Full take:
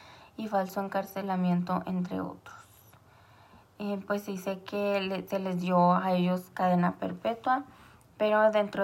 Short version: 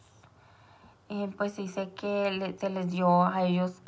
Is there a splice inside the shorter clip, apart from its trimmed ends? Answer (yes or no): no